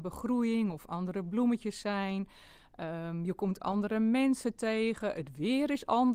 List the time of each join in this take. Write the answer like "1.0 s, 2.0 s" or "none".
none